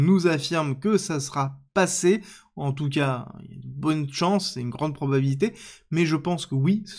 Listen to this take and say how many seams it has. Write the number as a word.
zero